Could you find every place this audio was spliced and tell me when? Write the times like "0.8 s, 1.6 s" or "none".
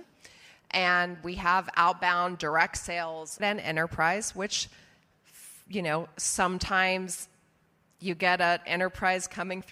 3.4 s